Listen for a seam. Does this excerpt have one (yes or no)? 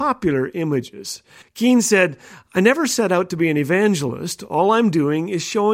yes